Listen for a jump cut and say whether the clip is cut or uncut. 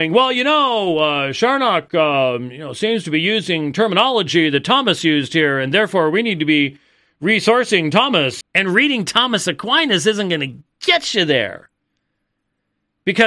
cut